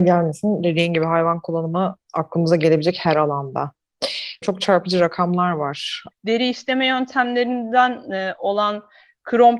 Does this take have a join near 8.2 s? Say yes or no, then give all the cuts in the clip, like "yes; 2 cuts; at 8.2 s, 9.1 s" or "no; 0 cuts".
no; 2 cuts; at 4.4 s, 6.1 s